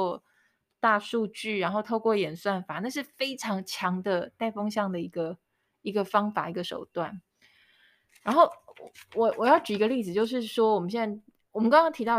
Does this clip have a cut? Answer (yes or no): no